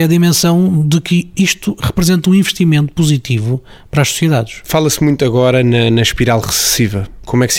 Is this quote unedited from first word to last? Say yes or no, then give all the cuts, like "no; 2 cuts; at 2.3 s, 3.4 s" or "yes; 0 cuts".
yes; 0 cuts